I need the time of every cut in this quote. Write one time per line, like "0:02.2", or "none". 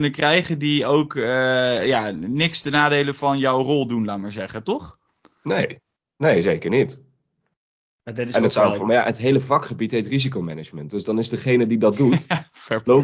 0:08.8